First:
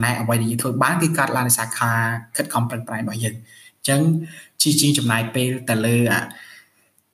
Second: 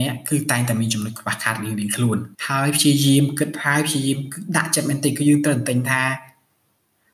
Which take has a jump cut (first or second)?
second